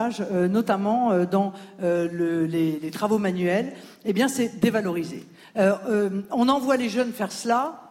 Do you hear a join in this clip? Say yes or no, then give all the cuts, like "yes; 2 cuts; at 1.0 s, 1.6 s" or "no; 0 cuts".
yes; 1 cut; at 5.4 s